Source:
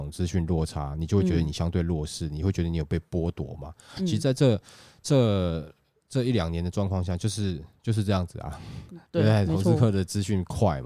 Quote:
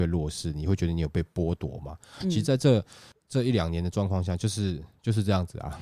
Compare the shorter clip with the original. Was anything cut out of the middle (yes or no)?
yes